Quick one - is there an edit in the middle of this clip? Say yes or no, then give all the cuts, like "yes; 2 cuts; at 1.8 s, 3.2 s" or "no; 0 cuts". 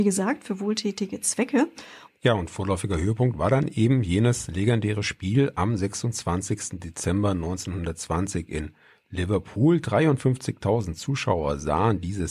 yes; 1 cut; at 2.1 s